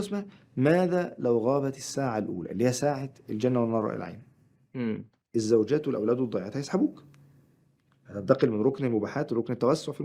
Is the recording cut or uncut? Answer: uncut